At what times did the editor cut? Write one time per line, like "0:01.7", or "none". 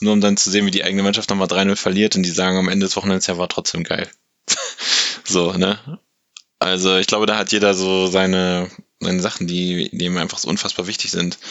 none